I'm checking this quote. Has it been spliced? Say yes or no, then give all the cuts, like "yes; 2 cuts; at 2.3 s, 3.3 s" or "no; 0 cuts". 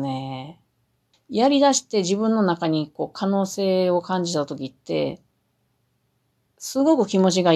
yes; 1 cut; at 1.1 s